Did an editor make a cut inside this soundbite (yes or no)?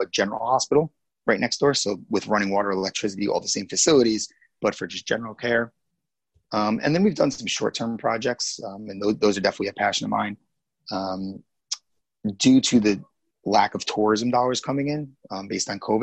no